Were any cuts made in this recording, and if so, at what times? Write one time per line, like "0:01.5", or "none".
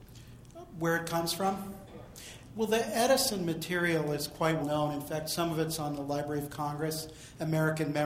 0:04.6